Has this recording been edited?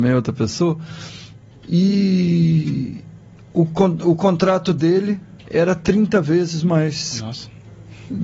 yes; 2 cuts; at 1.5 s, 5.4 s

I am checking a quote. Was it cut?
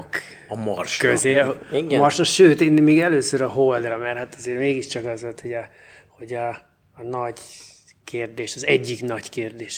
no; 0 cuts

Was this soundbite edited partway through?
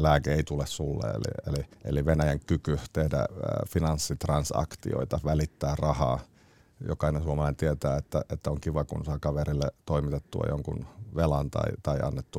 yes; 1 cut; at 1.7 s

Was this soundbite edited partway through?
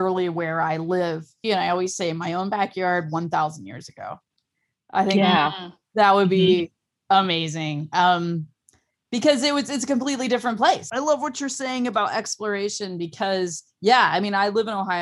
yes; 1 cut; at 1.4 s

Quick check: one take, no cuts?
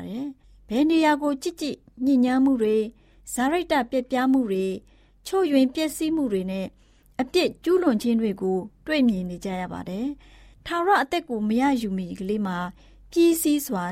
yes; 0 cuts

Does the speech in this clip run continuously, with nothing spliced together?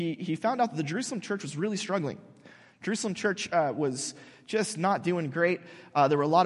yes; 0 cuts

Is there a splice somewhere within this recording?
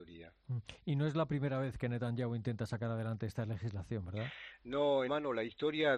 yes; 1 cut; at 5.1 s

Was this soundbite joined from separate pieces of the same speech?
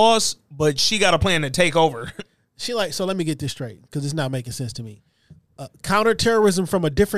no; 0 cuts

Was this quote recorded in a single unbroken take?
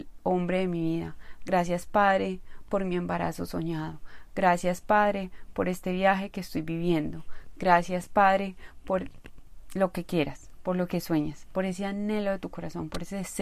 yes; 0 cuts

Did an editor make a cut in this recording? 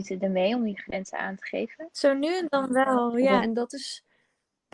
yes; 1 cut; at 3.4 s

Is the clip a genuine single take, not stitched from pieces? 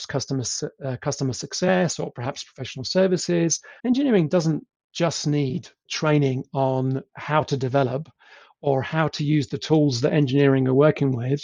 no; 2 cuts; at 3.8 s, 5.9 s

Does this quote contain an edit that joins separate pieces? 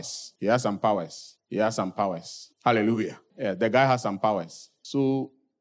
no; 0 cuts

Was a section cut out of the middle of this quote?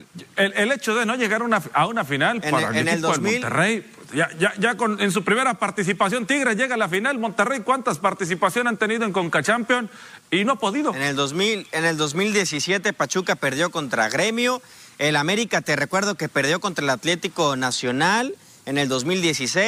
no; 0 cuts

